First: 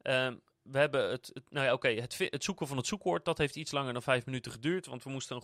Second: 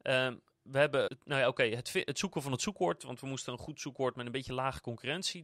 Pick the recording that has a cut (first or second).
second